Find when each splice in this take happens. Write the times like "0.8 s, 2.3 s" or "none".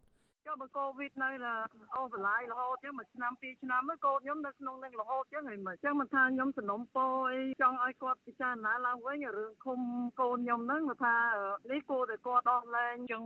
none